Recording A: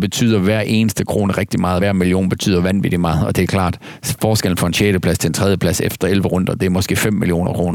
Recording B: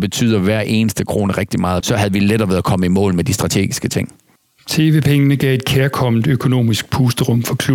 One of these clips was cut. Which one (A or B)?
B